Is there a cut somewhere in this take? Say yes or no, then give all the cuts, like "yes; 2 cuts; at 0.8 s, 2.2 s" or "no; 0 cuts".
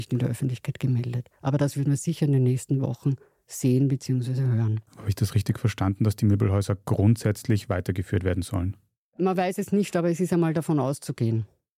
yes; 1 cut; at 4.9 s